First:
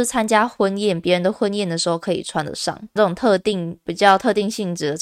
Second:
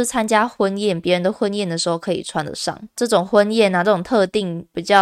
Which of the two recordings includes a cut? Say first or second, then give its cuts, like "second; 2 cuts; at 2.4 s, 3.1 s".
first; 1 cut; at 3.0 s